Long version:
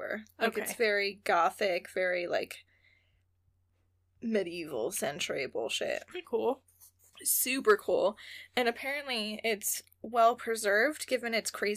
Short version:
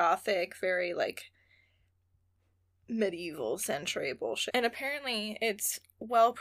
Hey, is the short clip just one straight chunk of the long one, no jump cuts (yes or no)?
no